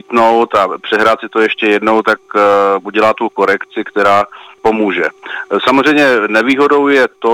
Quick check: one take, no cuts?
yes; 0 cuts

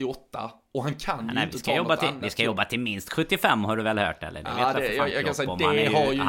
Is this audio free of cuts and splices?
yes; 0 cuts

